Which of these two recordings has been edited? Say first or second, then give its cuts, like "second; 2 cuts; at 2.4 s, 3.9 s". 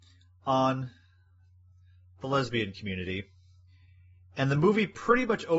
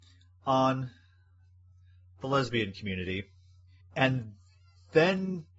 second; 1 cut; at 3.8 s